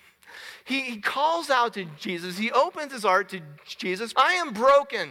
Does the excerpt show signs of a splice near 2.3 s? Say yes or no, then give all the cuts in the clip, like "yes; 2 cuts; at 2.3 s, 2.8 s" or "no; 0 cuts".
no; 1 cut; at 4.1 s